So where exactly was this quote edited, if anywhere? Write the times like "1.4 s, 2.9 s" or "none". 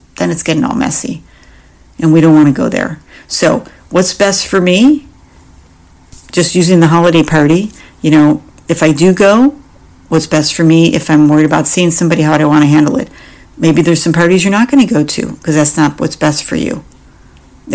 none